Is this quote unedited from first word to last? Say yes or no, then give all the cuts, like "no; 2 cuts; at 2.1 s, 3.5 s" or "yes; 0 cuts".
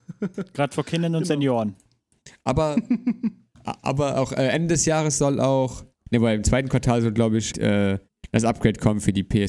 no; 1 cut; at 7.5 s